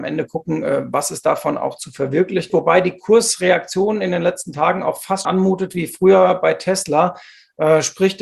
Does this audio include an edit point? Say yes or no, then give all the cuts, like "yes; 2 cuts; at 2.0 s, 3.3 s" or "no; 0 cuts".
yes; 2 cuts; at 2.5 s, 5.2 s